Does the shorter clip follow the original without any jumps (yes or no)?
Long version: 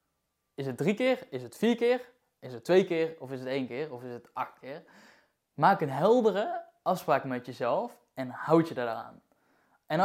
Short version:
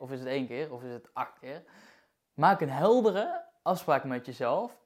yes